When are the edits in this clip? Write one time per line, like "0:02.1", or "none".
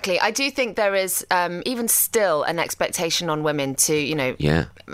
none